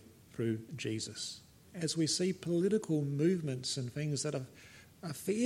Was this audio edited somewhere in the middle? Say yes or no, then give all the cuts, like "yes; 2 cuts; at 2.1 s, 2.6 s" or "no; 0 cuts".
yes; 1 cut; at 1.7 s